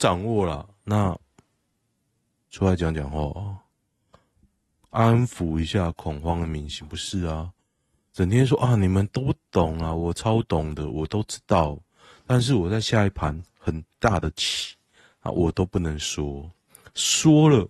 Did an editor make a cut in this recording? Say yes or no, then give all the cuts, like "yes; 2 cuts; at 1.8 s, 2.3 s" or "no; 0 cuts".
no; 0 cuts